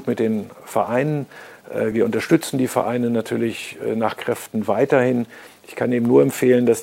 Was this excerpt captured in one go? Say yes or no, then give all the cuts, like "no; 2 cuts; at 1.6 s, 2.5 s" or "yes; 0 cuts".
yes; 0 cuts